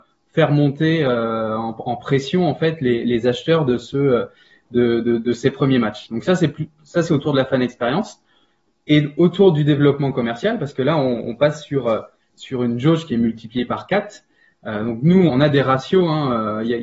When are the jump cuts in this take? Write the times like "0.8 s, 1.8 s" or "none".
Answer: 15.3 s

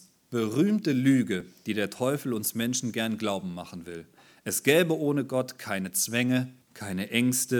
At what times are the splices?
6.6 s

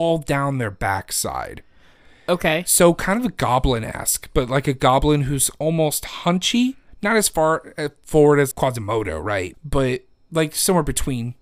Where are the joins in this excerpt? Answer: 8.5 s, 9.5 s

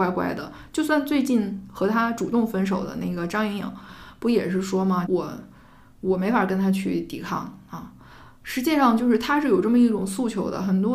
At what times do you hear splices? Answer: 5.1 s

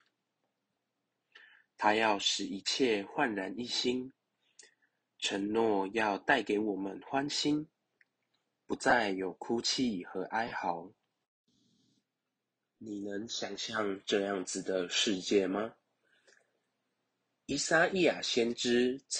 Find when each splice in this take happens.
none

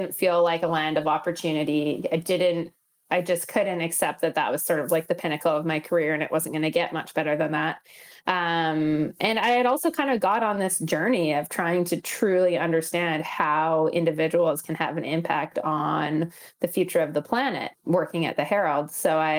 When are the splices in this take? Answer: 17.7 s

